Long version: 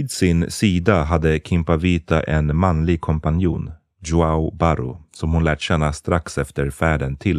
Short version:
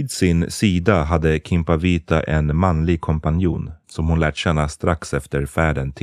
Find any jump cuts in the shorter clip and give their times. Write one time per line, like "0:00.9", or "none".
0:03.8

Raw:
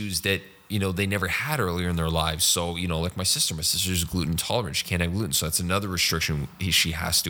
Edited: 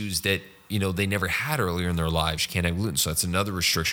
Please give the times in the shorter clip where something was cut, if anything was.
0:02.4

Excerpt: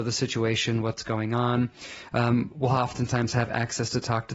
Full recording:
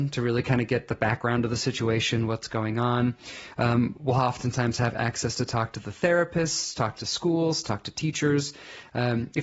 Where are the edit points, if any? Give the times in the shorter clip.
none

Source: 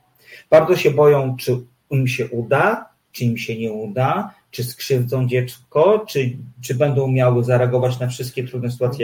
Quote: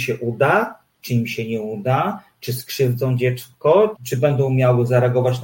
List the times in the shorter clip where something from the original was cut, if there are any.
0:03.9

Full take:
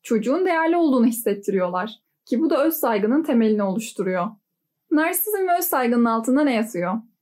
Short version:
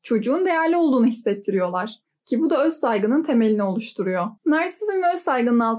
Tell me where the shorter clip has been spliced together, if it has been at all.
0:04.4

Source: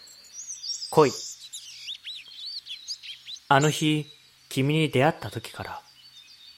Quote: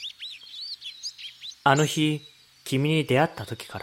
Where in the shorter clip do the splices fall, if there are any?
none

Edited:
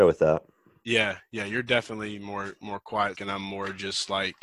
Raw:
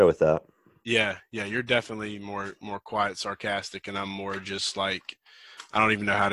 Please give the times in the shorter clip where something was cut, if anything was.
0:03.1

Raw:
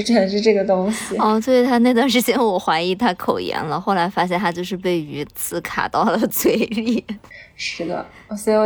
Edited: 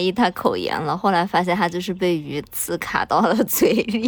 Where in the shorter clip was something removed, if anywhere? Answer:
none

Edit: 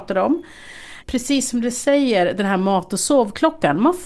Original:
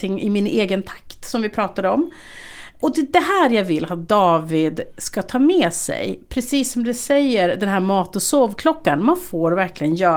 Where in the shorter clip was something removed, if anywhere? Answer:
0:01.0

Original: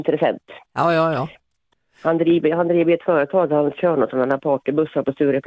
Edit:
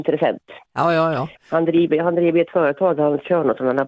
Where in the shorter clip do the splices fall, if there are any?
0:01.4

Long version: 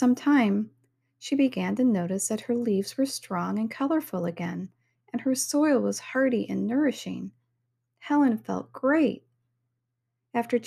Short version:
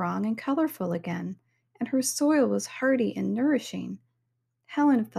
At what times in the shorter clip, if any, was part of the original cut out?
none

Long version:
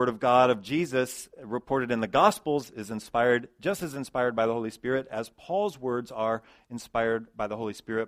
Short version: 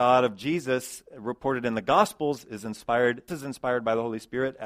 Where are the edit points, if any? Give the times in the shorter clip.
0:03.3

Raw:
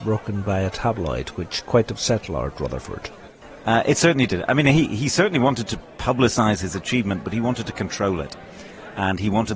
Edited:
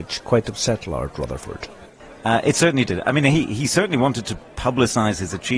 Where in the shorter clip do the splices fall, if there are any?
none

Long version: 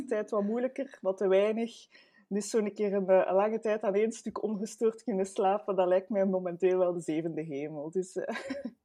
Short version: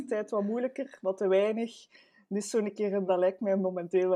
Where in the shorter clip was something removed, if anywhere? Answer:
0:03.1

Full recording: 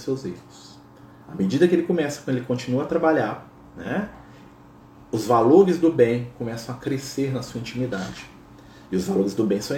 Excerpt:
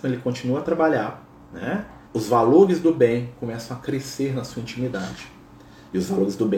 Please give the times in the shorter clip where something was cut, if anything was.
0:02.0

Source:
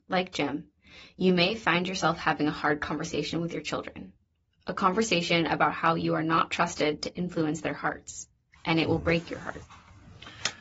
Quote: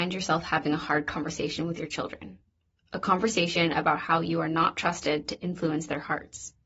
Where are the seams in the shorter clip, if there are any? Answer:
none

